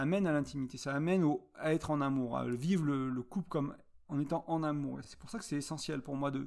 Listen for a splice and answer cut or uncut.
uncut